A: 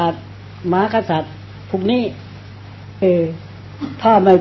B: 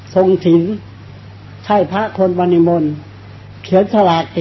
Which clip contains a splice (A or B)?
A